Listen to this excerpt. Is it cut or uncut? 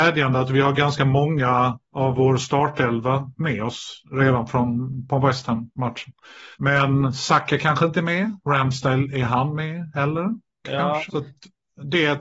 cut